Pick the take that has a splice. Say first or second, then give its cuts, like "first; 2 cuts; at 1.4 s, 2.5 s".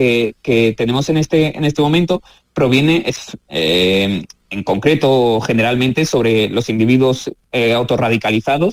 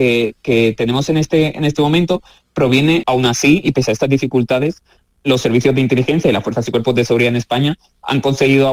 second; 1 cut; at 3.0 s